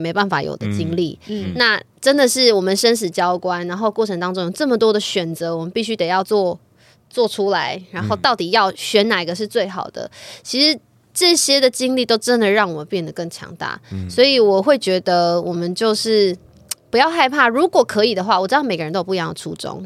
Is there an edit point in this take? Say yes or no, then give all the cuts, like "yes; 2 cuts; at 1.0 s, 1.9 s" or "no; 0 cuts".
no; 0 cuts